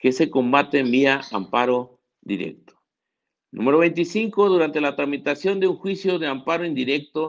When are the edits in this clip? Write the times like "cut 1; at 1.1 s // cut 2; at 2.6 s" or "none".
none